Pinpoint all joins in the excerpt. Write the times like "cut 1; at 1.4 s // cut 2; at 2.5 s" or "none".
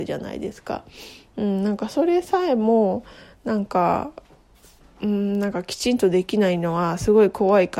none